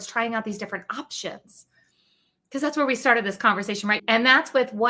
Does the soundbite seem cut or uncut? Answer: cut